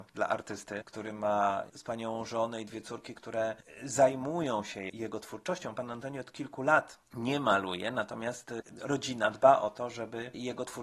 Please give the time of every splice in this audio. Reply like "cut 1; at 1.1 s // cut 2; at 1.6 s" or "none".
none